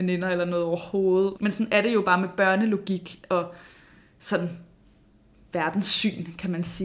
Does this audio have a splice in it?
yes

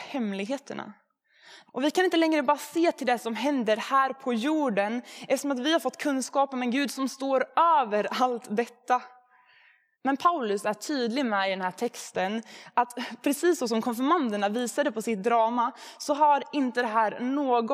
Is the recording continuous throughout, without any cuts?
no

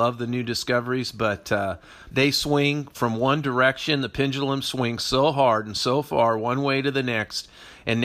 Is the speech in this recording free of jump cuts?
no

